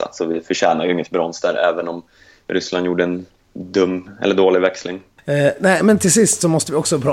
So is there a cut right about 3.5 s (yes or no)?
yes